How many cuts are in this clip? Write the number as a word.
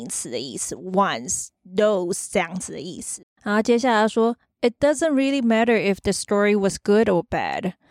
one